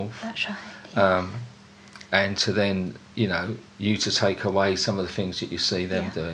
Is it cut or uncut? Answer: uncut